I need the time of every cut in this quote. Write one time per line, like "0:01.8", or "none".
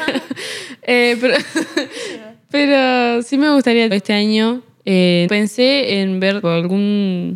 0:03.9
0:05.3
0:06.4